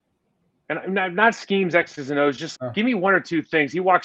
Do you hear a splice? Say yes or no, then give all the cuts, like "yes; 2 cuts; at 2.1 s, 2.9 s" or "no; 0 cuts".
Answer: yes; 1 cut; at 2.5 s